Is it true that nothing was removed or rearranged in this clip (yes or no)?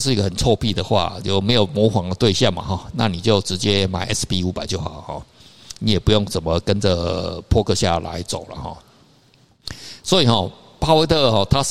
yes